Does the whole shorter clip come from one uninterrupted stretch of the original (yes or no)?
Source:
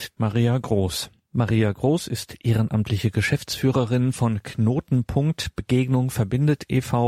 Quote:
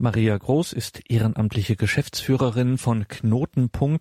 yes